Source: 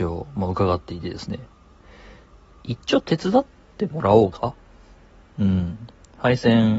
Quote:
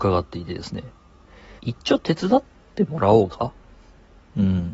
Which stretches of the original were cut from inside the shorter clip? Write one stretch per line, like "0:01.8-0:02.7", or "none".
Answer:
0:02.1-0:02.6